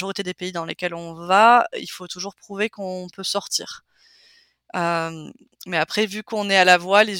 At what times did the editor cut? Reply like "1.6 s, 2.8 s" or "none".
none

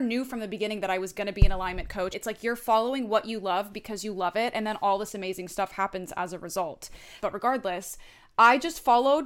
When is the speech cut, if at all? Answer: 2.1 s, 7.2 s

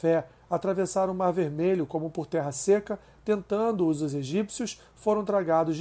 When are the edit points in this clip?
none

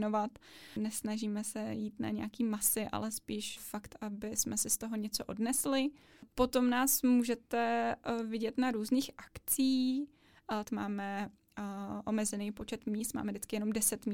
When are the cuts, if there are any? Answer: 3.6 s, 6.3 s, 10.6 s

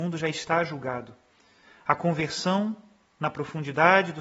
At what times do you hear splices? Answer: none

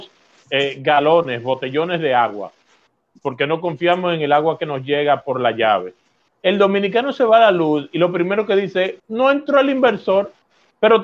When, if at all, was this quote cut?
6.3 s, 9.0 s

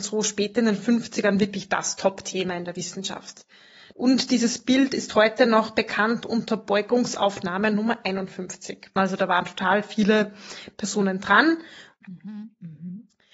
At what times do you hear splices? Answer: 3.9 s, 9.0 s, 12.0 s

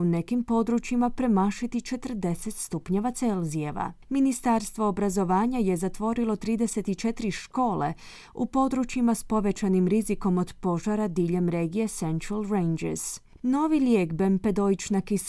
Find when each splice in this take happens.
13.4 s

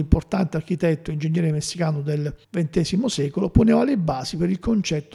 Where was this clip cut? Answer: 2.4 s

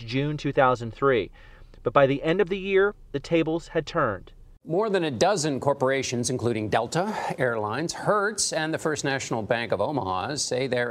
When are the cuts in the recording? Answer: none

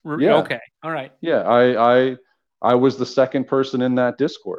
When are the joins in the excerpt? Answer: none

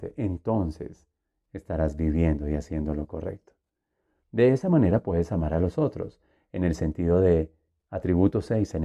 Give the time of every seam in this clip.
none

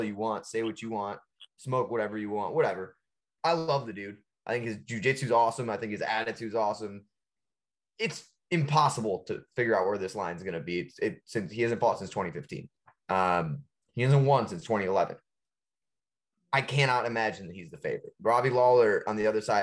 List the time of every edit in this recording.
none

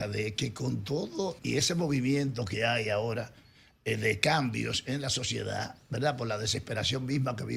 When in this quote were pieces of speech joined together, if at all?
1.4 s

